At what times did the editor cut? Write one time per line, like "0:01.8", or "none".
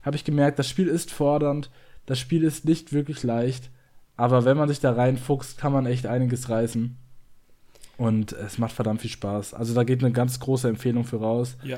none